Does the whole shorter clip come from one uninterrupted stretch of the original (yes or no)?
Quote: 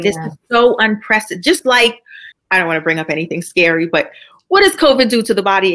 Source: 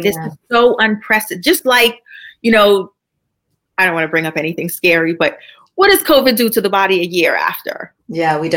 no